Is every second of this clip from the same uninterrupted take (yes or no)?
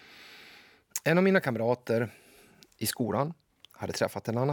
yes